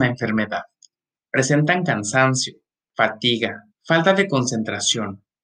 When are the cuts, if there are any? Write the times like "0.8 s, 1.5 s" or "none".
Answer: 1.1 s, 3.7 s